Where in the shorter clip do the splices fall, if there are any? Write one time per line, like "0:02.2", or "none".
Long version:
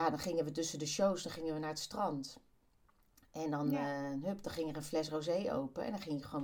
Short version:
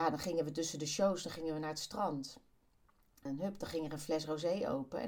0:03.3